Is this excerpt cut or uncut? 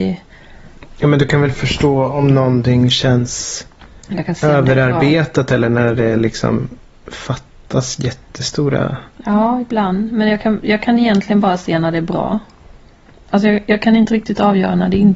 uncut